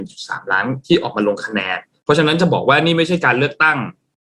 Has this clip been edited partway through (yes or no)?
no